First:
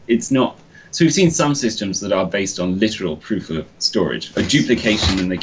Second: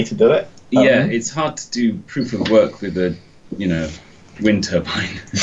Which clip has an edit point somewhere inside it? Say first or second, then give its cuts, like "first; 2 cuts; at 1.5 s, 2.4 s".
first; 1 cut; at 4.3 s